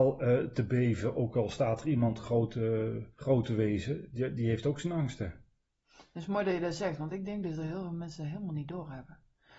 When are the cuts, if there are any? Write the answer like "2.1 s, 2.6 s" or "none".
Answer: 3.1 s